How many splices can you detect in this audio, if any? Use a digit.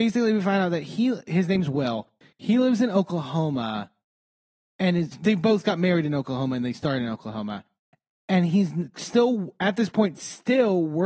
1